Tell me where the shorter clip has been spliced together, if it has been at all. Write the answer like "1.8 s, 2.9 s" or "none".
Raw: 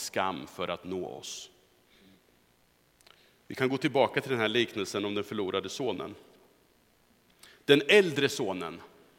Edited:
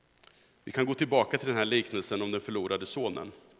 none